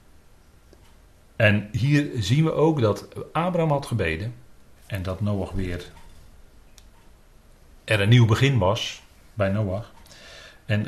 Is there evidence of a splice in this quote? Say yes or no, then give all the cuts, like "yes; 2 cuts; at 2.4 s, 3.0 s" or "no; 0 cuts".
yes; 1 cut; at 4.8 s